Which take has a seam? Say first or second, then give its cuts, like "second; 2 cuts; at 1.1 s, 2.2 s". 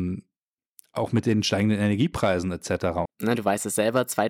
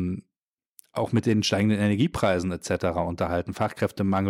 first; 1 cut; at 3.1 s